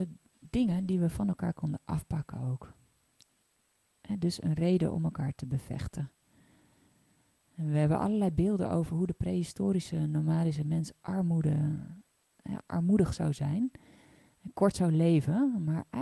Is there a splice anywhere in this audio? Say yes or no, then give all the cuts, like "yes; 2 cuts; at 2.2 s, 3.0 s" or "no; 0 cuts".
no; 0 cuts